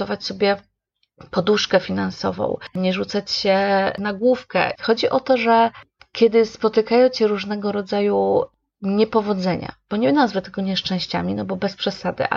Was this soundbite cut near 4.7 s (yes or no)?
yes